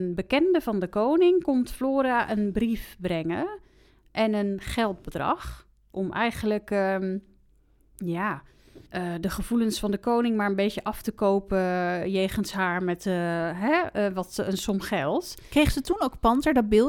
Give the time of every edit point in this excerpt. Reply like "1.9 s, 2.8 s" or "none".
8.9 s